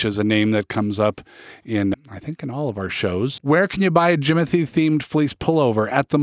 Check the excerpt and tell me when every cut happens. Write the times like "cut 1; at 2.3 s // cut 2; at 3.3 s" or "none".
cut 1; at 1.9 s // cut 2; at 3.4 s